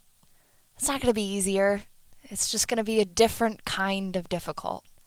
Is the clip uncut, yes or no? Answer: yes